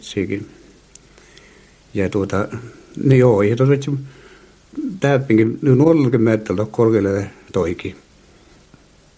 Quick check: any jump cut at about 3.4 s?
no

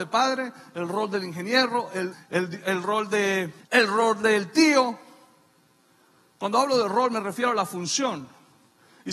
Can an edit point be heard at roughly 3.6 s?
yes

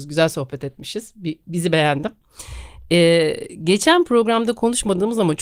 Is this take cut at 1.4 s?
yes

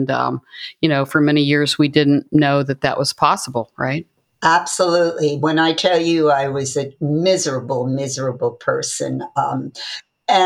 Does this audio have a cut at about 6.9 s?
no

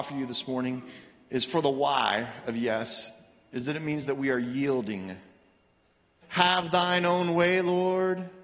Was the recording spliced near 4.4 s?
no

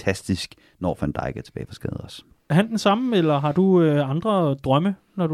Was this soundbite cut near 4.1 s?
no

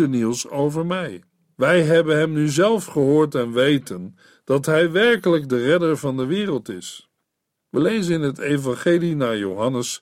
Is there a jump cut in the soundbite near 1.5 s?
yes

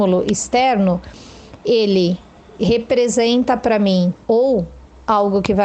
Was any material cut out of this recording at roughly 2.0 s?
no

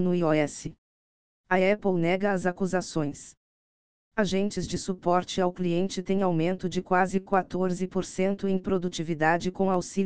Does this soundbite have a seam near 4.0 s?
yes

